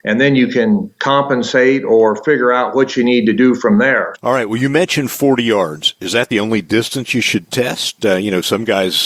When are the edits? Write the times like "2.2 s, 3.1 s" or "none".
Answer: 4.1 s